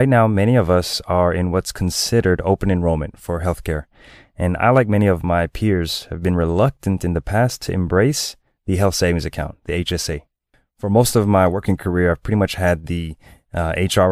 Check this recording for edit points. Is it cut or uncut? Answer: uncut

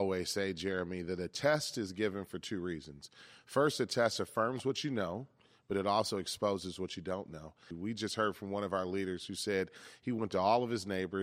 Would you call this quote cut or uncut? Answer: cut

